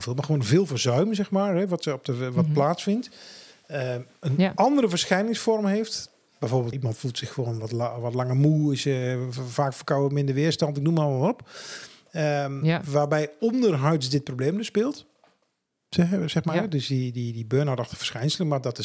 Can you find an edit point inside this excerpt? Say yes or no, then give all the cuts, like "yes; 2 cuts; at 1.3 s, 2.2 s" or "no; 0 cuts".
yes; 1 cut; at 6.7 s